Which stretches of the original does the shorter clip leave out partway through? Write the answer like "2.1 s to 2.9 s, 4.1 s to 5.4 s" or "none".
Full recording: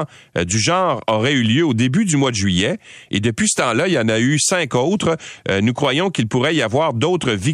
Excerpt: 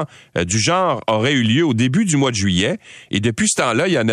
none